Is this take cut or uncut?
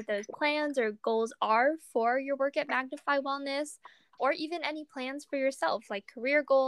cut